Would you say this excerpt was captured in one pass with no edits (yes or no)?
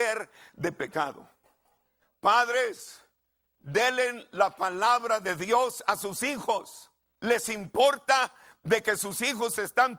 no